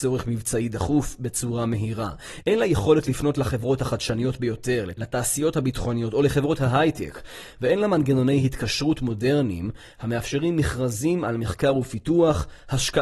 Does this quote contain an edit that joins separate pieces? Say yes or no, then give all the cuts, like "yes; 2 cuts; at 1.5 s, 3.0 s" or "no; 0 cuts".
no; 0 cuts